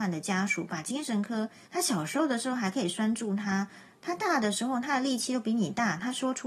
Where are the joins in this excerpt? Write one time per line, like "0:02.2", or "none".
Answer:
0:01.6